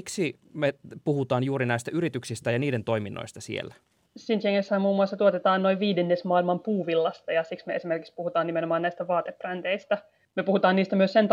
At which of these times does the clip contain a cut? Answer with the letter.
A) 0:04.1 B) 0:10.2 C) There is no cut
C